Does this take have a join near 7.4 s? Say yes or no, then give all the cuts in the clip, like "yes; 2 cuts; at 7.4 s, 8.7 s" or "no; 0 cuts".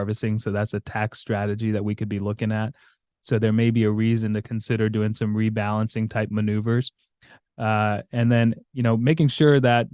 yes; 2 cuts; at 3.1 s, 7.4 s